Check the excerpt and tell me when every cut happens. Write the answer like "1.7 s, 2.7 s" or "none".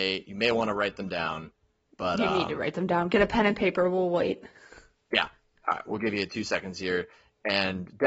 none

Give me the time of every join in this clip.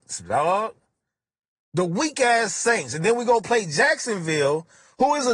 none

